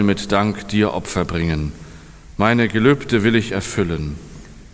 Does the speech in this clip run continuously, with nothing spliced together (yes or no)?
yes